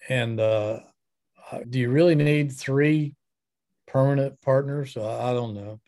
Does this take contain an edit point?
yes; 1 cut; at 1.6 s

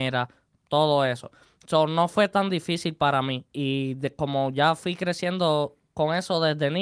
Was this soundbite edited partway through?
no; 0 cuts

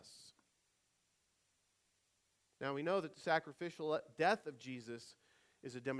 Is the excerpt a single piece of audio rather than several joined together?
yes; 0 cuts

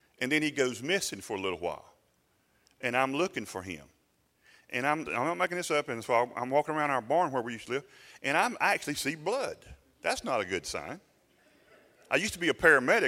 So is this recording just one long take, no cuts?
no; 1 cut; at 5.1 s

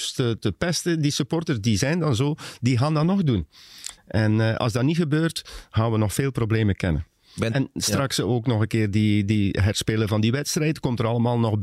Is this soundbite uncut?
no; 1 cut; at 4.0 s

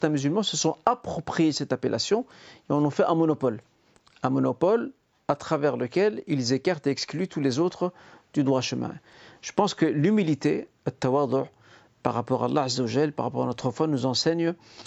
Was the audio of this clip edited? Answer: no; 0 cuts

